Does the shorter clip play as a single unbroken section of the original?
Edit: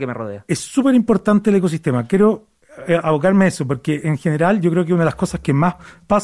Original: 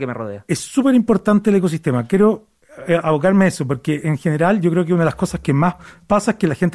yes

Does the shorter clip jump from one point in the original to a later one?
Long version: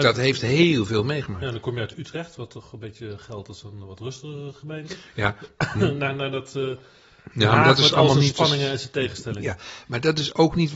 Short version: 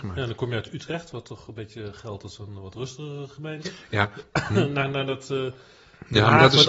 no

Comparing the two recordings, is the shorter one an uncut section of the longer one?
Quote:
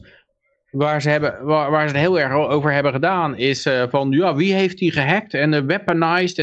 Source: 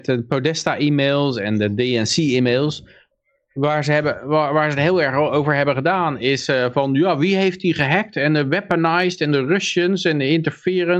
yes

